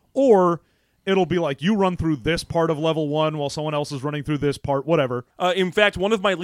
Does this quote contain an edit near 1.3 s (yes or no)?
no